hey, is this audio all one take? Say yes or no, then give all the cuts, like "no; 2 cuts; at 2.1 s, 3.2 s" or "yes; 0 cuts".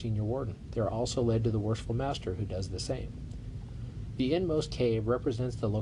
no; 1 cut; at 4.2 s